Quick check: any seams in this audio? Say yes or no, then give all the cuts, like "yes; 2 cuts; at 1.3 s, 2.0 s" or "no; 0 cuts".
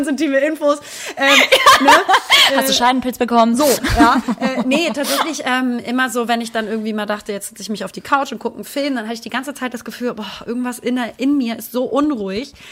no; 0 cuts